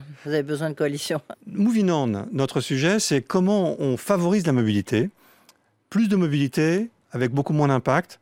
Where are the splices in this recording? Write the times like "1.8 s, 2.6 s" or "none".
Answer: 1.3 s

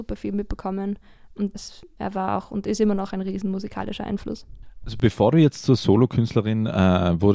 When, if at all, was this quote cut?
1.5 s

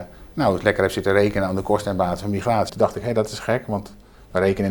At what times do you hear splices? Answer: 2.7 s

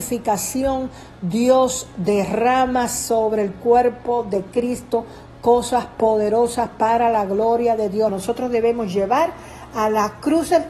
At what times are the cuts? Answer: 8.1 s

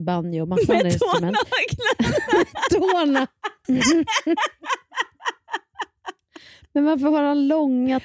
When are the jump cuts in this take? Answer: 3.6 s

